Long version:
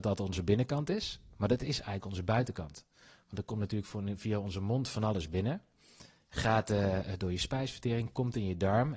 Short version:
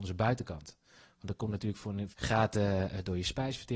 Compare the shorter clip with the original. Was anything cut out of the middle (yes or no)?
yes